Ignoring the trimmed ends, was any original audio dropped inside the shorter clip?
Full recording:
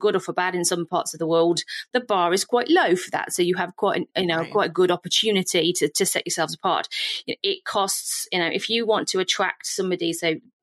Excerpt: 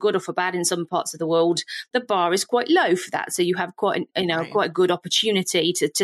no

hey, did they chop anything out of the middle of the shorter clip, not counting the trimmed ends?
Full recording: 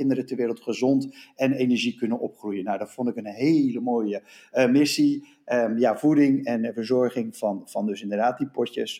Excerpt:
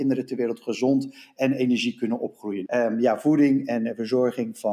yes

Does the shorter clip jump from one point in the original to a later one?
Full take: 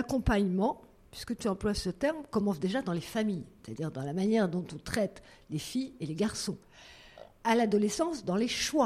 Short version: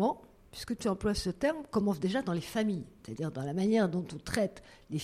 no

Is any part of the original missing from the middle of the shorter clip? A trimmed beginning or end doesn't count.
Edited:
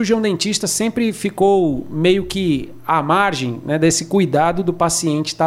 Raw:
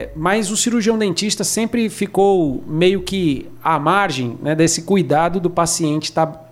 no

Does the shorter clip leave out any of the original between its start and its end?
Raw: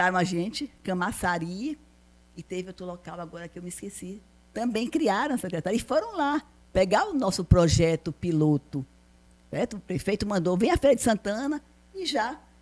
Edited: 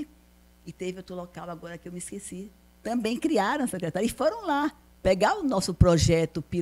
no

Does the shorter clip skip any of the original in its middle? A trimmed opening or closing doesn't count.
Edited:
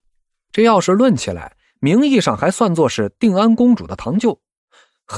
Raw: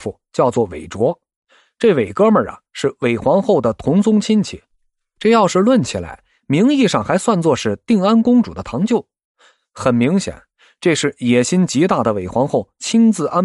no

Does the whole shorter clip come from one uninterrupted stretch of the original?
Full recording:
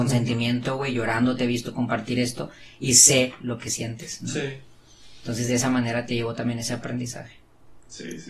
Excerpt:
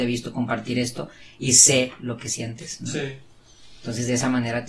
yes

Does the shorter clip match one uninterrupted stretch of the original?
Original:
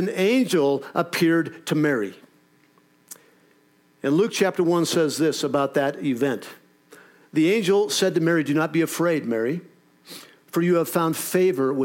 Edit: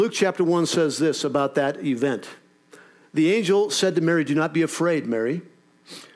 yes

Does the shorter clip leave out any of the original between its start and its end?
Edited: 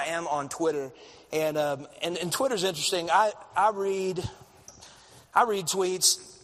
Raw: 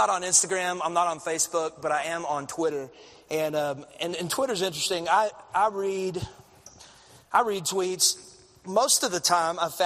no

